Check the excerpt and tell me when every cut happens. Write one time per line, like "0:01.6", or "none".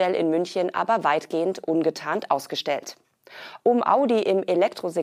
0:03.6